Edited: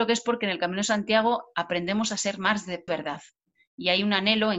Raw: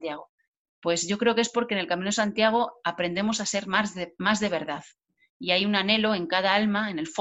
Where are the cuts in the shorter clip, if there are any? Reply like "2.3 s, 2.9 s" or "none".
2.9 s